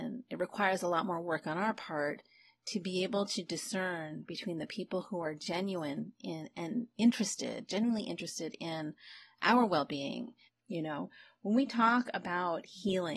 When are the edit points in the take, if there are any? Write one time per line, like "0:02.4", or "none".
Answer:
0:10.5